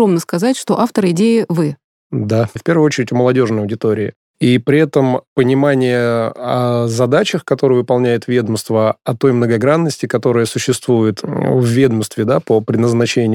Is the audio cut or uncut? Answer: cut